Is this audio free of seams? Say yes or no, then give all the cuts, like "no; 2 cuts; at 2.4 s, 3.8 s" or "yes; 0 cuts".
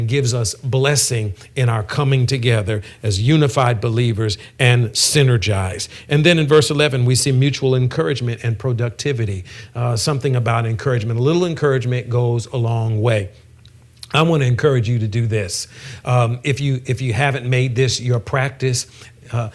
yes; 0 cuts